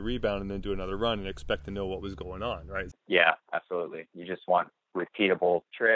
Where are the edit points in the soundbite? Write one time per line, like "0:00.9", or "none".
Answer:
0:02.9

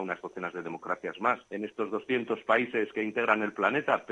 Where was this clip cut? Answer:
0:01.5

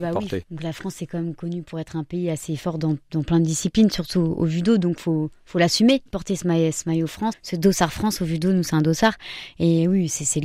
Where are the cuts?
0:06.1
0:07.3

